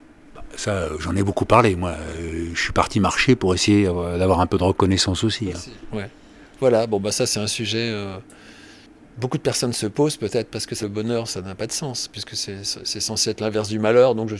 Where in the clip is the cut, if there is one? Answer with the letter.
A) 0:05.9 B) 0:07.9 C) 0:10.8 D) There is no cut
C